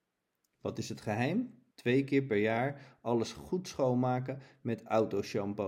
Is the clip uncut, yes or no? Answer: no